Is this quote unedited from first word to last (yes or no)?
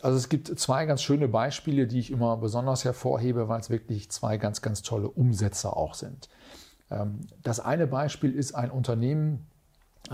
yes